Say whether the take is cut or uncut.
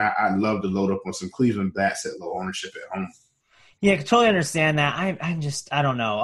uncut